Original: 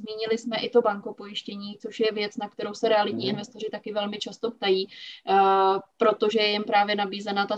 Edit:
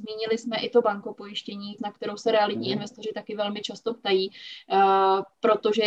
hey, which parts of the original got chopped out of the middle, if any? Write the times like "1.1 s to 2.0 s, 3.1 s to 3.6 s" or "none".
1.8 s to 2.4 s